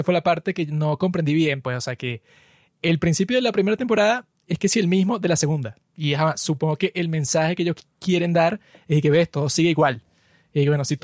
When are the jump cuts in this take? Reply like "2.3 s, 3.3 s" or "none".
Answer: none